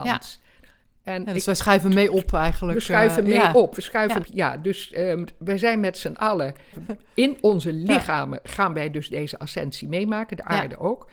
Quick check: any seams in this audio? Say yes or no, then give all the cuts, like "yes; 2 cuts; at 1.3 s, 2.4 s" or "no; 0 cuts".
yes; 2 cuts; at 4.2 s, 6.7 s